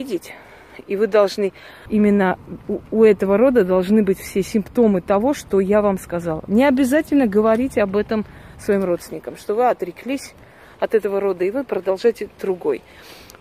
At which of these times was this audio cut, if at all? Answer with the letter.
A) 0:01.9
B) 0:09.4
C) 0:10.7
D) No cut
A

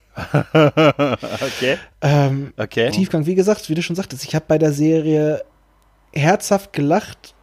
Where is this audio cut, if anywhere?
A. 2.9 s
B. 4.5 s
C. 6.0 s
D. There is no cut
A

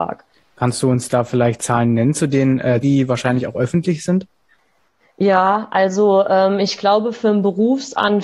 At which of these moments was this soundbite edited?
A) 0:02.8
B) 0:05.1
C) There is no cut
A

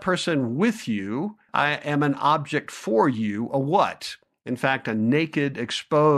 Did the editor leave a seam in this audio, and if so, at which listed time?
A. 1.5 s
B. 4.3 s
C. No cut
A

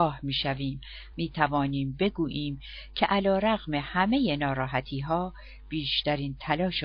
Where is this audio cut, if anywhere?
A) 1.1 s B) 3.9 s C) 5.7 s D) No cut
A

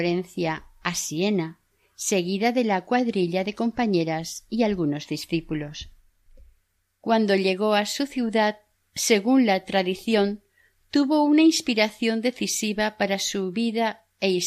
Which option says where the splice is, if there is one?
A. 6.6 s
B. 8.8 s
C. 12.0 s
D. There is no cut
D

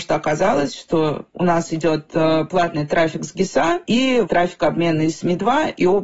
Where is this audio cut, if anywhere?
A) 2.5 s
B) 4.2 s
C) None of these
B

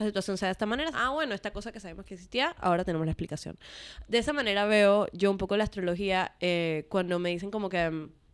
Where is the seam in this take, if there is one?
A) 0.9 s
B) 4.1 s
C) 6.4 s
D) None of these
A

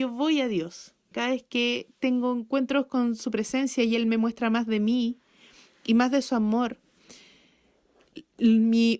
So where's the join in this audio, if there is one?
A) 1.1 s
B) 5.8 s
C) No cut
A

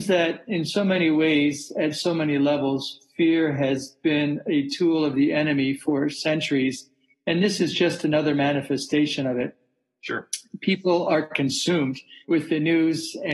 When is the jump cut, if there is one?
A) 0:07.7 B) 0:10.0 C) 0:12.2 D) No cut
C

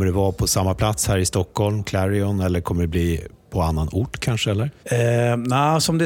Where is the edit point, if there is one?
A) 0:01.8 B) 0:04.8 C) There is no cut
B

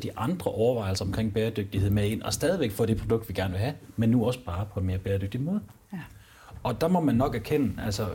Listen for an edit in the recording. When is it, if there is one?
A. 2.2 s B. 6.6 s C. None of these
C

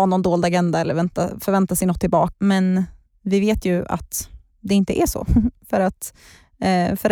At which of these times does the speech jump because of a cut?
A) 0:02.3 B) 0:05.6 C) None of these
A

